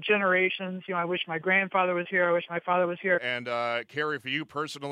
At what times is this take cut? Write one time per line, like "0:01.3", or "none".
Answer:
0:03.2